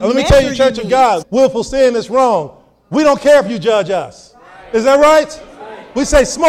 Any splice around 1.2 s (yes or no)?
yes